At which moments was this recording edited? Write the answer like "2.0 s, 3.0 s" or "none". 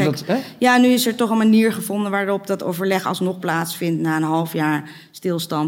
none